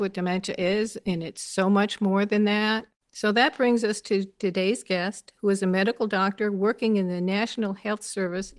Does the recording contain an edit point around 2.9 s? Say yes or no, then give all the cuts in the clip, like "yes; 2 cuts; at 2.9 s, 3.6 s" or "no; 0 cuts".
yes; 1 cut; at 2.9 s